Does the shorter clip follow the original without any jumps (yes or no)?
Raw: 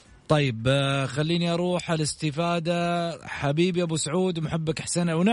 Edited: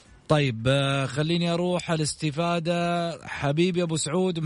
yes